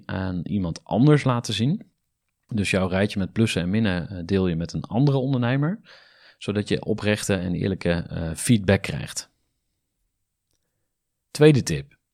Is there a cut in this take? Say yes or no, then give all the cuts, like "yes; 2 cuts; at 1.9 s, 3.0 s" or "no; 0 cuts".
no; 0 cuts